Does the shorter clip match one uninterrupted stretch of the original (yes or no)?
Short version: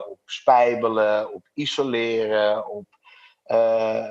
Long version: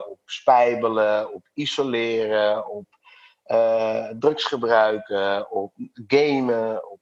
yes